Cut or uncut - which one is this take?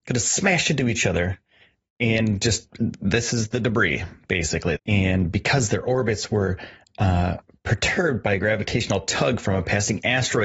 cut